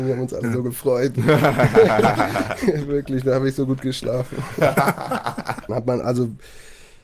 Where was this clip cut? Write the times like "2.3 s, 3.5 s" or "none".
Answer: 5.7 s